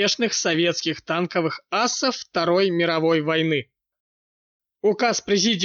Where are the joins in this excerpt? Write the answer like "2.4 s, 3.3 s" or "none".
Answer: 4.7 s